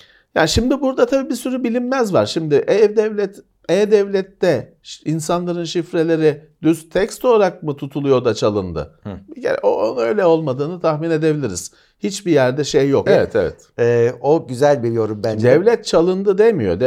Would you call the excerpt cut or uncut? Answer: cut